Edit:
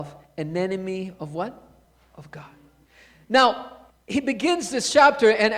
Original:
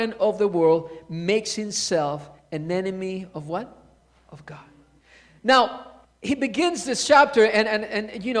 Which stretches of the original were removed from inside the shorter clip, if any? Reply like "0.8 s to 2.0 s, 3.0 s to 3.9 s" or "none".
none